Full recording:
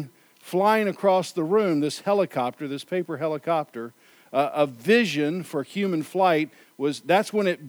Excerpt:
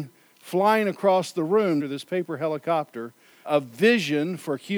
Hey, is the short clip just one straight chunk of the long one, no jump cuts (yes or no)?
no